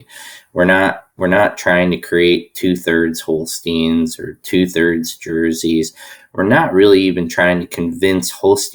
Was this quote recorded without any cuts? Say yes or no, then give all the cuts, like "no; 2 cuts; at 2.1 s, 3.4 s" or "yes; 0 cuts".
yes; 0 cuts